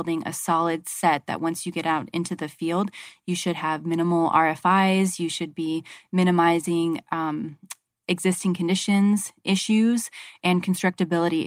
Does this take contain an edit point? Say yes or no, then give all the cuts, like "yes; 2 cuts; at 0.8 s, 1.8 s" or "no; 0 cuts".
no; 0 cuts